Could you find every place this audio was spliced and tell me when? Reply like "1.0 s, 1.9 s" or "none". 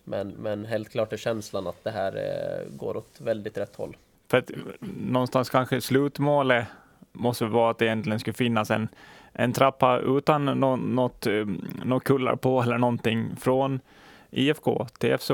none